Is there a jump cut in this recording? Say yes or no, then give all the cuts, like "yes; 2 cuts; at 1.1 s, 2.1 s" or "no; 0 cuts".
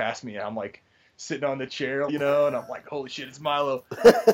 yes; 1 cut; at 2.1 s